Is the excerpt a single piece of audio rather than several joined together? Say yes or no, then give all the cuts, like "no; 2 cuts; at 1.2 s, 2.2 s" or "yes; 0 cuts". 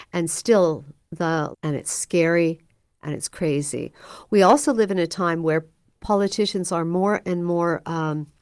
no; 1 cut; at 1.5 s